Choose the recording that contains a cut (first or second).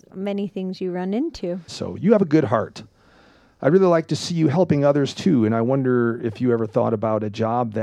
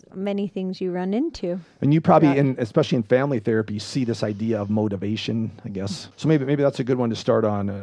first